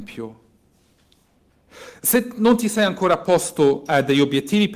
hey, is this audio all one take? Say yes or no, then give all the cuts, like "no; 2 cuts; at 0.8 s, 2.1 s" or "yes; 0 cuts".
yes; 0 cuts